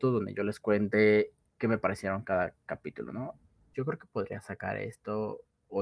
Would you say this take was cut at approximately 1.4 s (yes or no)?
yes